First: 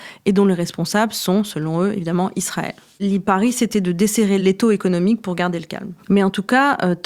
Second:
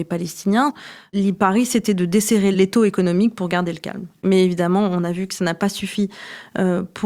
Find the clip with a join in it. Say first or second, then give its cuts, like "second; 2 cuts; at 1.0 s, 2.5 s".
first; 2 cuts; at 3.0 s, 6.0 s